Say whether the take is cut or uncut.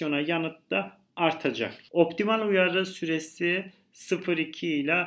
uncut